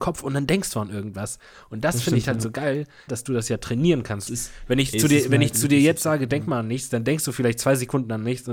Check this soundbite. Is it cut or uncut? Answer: cut